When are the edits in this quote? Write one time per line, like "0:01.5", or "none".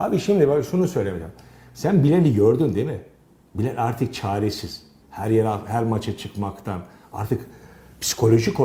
0:05.0